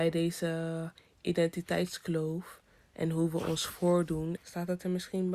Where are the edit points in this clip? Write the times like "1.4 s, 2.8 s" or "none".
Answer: 4.4 s

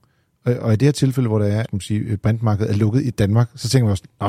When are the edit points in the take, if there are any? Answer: 1.6 s

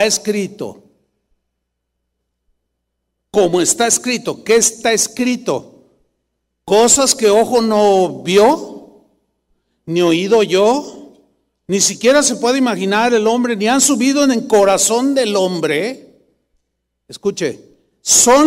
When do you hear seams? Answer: none

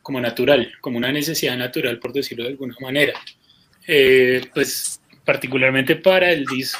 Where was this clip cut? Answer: 3.7 s

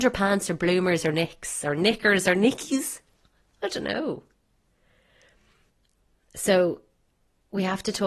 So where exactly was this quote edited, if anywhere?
none

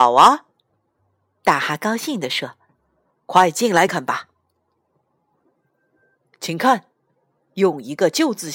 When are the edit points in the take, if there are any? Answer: 3.9 s

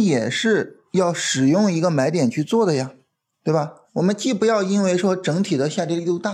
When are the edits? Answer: 3.8 s

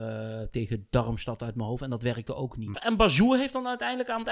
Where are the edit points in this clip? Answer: 2.7 s

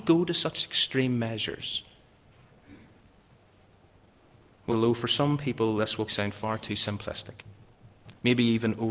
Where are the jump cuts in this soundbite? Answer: 4.7 s, 6.1 s

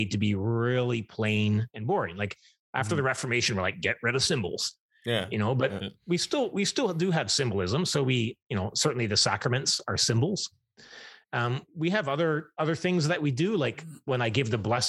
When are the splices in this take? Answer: none

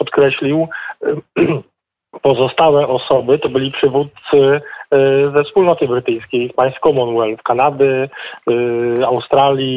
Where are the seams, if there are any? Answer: none

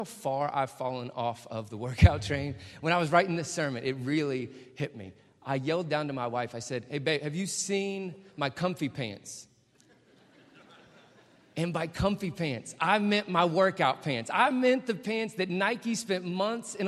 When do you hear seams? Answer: none

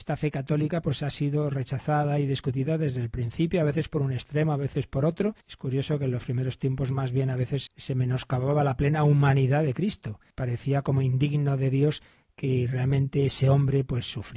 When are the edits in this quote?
5.4 s, 7.7 s, 10.3 s

